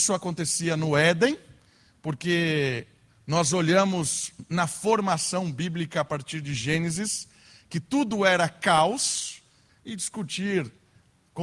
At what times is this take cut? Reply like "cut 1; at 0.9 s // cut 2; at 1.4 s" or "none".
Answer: cut 1; at 9.7 s